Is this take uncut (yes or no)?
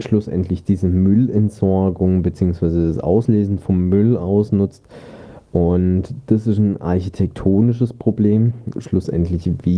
no